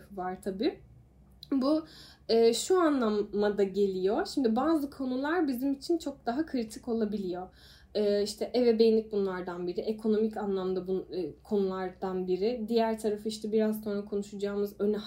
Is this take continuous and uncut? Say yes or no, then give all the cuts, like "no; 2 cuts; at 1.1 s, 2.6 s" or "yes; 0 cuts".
yes; 0 cuts